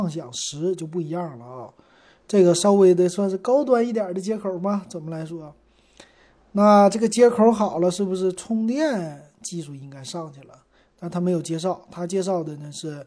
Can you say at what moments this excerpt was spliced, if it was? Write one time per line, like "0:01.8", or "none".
none